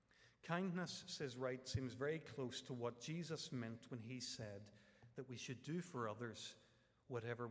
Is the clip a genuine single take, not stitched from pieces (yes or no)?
yes